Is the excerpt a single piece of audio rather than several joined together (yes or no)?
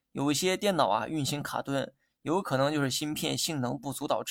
yes